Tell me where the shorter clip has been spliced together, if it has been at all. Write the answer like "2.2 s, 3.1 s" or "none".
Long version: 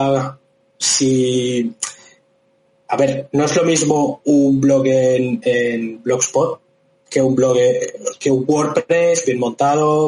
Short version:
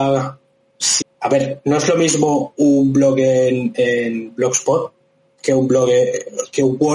1.0 s